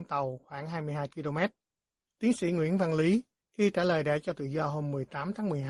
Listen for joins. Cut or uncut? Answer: cut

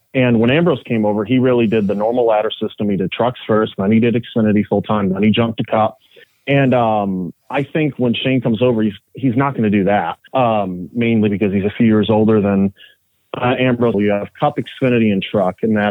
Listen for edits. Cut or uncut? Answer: cut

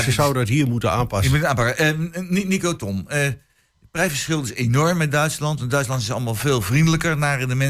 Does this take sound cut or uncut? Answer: uncut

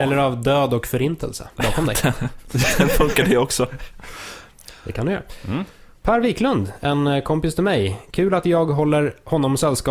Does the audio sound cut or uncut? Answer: uncut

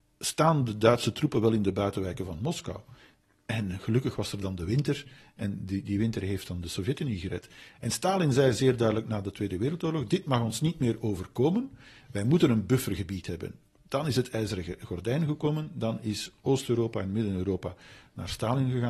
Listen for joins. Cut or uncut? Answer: uncut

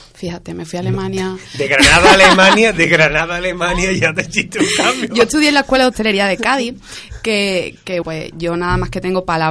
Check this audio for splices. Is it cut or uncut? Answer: cut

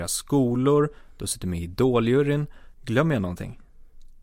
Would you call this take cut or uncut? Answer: cut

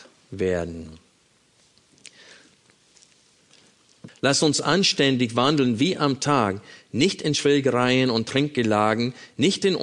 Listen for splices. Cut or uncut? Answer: cut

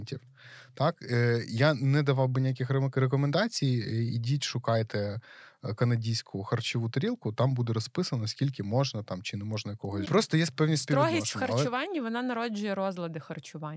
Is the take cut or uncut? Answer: cut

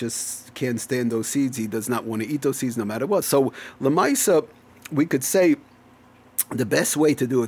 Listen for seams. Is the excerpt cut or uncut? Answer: cut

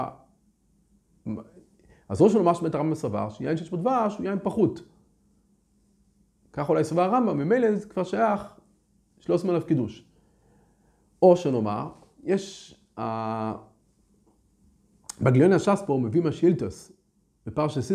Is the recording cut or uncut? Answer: uncut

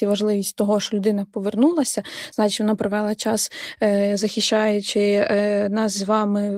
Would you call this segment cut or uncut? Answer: uncut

